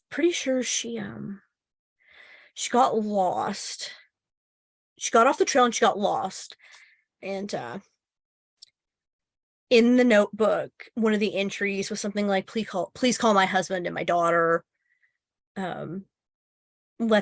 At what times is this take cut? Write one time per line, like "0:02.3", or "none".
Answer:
0:07.2
0:12.4